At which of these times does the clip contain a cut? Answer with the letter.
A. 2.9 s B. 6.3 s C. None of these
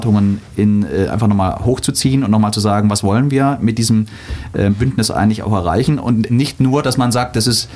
B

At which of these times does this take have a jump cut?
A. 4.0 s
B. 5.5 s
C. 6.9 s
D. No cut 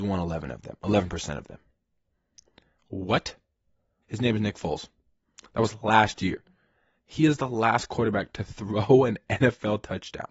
A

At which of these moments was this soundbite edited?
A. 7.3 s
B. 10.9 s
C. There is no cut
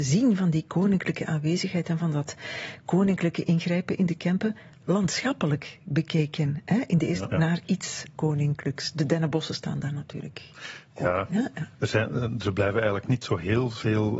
A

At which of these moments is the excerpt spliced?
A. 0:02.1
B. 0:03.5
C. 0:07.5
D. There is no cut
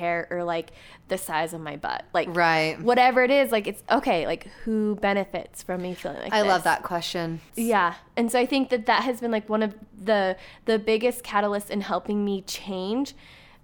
C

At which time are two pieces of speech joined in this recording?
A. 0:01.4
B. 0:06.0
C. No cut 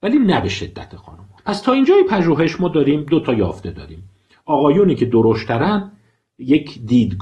A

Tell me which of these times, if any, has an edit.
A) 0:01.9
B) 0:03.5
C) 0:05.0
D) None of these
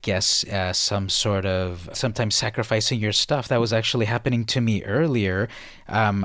A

